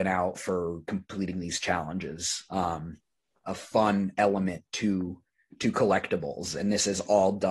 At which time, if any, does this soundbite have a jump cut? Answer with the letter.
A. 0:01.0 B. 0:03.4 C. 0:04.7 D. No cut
B